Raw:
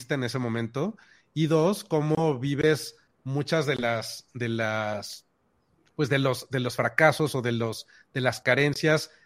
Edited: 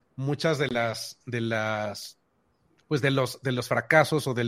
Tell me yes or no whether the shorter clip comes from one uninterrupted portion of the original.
yes